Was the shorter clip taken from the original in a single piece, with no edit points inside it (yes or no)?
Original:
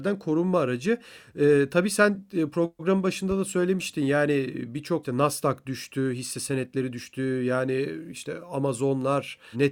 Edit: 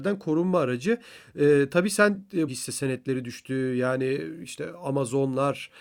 no